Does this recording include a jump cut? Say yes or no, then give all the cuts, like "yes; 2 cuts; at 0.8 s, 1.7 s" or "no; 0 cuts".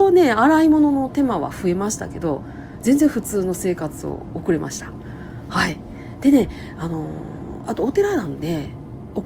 no; 0 cuts